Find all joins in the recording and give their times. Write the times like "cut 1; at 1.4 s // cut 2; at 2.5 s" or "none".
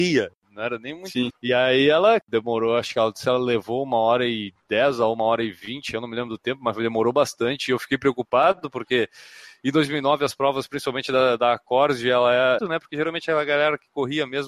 cut 1; at 1.3 s // cut 2; at 12.6 s